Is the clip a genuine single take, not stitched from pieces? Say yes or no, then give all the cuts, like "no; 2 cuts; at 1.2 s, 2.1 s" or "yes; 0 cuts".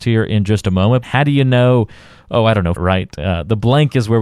no; 2 cuts; at 1.0 s, 2.8 s